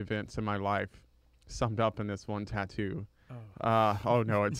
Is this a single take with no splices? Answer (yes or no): yes